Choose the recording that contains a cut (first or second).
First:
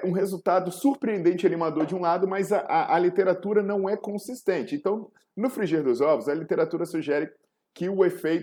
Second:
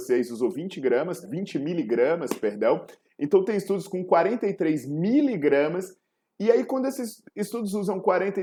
second